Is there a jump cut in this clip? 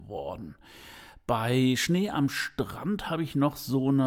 no; 0 cuts

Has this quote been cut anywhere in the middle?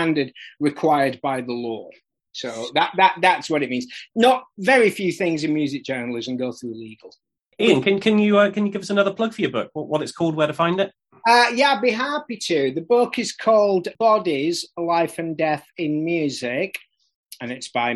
no; 0 cuts

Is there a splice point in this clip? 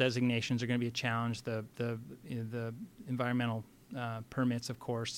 no; 0 cuts

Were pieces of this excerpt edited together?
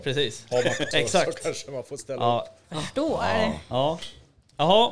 yes; 2 cuts; at 0.9 s, 2.6 s

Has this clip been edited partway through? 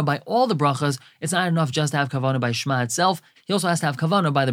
no; 0 cuts

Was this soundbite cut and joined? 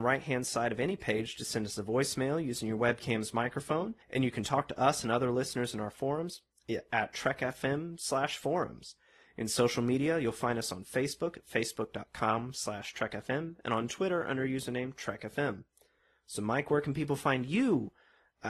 yes; 1 cut; at 4.0 s

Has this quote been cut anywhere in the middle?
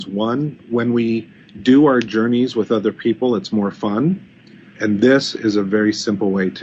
yes; 1 cut; at 4.7 s

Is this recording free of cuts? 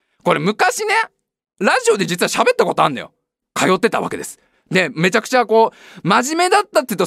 no; 1 cut; at 3.4 s

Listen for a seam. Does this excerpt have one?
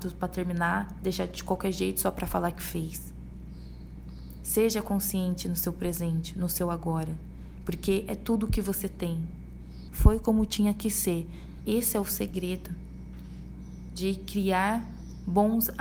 yes; 2 cuts; at 9.9 s, 11.6 s

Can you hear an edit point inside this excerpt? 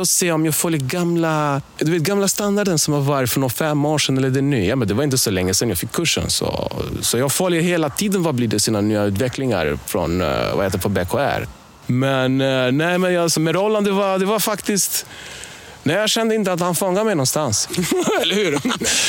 yes; 2 cuts; at 13.4 s, 17.7 s

